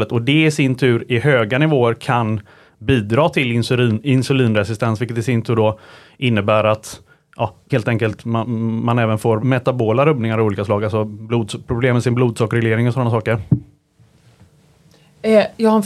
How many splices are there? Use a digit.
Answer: 2